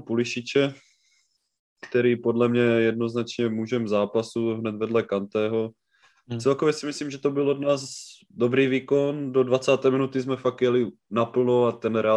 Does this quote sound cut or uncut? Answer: uncut